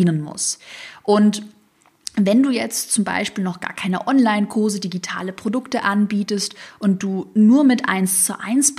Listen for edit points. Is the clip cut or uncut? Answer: uncut